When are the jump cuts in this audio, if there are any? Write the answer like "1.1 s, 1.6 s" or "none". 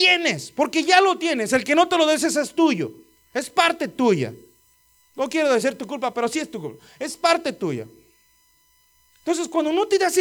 none